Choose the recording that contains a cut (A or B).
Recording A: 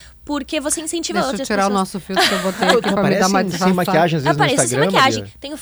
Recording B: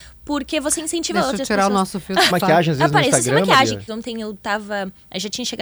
B